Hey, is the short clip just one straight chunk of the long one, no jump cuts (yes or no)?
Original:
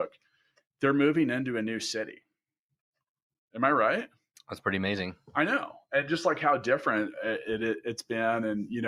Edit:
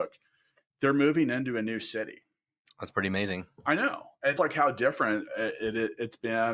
no